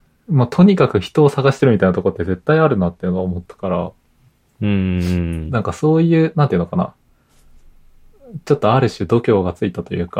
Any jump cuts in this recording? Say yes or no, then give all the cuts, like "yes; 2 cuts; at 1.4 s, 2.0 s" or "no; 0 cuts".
no; 0 cuts